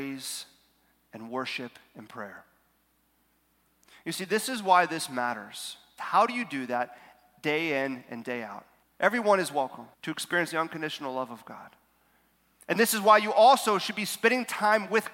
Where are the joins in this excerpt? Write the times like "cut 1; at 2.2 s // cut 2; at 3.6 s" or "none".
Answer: cut 1; at 6.0 s // cut 2; at 8.8 s // cut 3; at 9.9 s